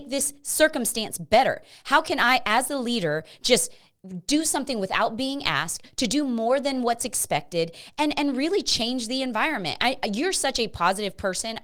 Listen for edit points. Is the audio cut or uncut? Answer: uncut